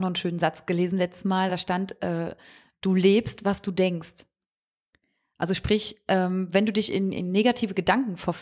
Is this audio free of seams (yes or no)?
yes